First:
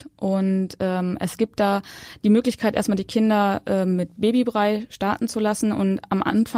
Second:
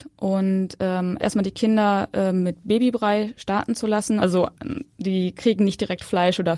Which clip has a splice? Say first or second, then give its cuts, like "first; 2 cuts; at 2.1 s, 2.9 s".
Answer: second; 2 cuts; at 1.2 s, 4.2 s